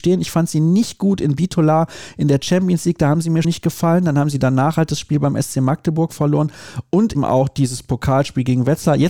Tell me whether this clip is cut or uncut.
cut